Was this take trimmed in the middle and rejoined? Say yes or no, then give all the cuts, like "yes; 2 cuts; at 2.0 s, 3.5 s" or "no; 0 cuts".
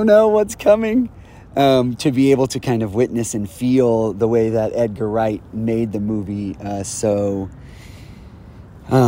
no; 0 cuts